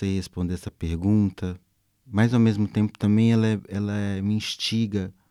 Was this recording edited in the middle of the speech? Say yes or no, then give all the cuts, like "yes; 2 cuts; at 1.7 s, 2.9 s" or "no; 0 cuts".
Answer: no; 0 cuts